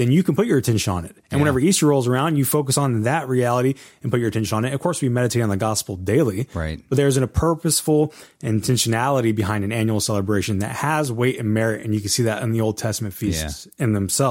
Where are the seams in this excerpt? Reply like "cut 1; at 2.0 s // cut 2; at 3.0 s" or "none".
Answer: none